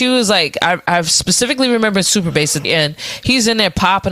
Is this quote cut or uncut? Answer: cut